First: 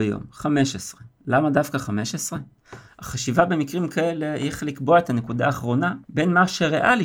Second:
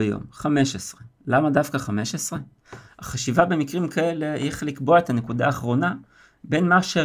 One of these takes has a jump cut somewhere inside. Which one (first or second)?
first